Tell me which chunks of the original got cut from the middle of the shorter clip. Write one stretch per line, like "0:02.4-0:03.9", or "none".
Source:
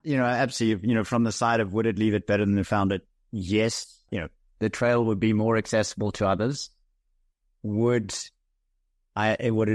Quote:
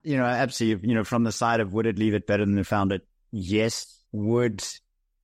0:04.0-0:07.5